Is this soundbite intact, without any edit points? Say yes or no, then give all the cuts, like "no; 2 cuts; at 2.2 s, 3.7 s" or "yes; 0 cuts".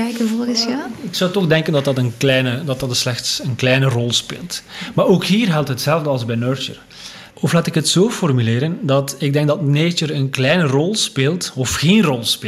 no; 1 cut; at 7.3 s